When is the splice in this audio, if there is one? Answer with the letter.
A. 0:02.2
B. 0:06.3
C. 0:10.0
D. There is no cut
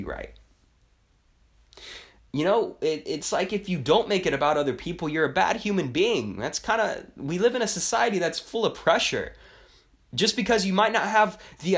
A